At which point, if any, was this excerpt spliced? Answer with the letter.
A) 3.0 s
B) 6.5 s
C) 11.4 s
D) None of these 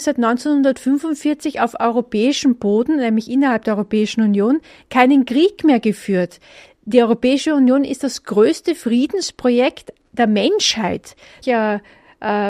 C